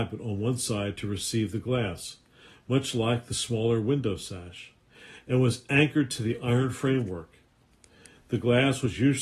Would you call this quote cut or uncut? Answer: uncut